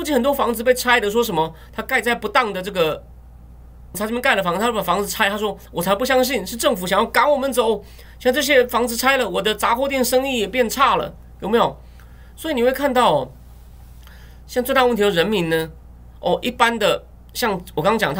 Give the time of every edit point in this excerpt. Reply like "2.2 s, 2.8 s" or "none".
3.9 s